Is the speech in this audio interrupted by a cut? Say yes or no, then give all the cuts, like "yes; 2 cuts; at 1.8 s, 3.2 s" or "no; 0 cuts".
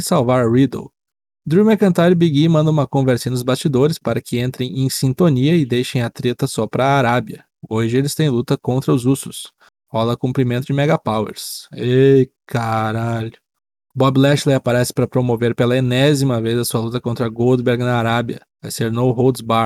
yes; 1 cut; at 18.5 s